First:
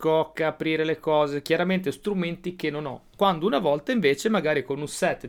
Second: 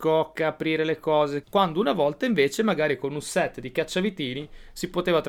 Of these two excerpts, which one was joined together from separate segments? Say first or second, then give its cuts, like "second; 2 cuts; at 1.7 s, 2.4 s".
second; 1 cut; at 1.4 s